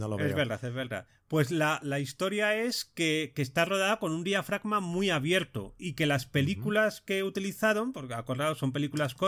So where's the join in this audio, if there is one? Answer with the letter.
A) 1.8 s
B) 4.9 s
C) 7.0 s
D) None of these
A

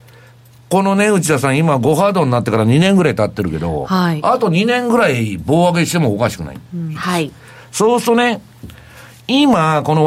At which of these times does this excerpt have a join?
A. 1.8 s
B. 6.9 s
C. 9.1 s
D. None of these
B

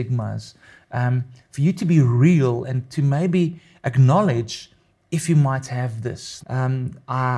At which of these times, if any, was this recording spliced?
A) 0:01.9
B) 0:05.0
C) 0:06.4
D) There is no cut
C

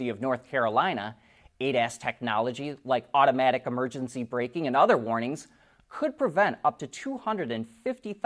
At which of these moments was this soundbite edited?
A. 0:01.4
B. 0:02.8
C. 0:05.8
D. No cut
D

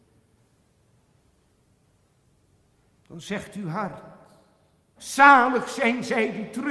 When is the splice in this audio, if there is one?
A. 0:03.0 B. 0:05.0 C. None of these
B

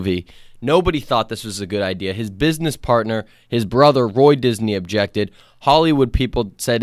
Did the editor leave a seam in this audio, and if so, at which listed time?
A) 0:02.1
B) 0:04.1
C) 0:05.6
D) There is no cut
D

